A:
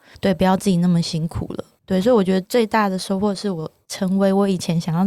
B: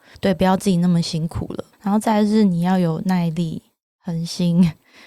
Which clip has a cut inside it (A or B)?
B